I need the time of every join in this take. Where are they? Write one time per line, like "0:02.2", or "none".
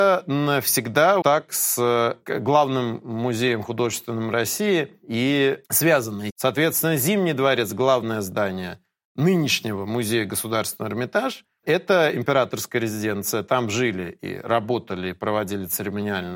0:01.2
0:06.3